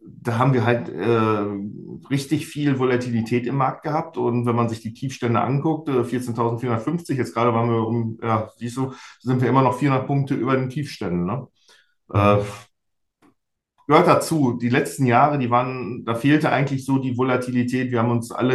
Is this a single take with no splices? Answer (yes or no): yes